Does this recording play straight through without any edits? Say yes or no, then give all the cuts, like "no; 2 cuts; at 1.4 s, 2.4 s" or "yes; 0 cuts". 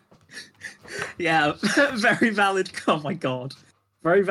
yes; 0 cuts